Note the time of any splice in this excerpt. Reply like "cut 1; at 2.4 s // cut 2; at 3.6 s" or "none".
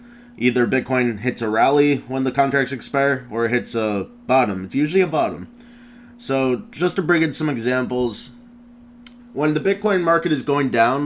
cut 1; at 9.2 s